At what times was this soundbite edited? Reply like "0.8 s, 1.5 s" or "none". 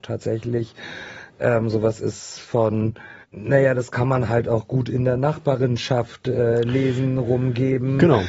3.2 s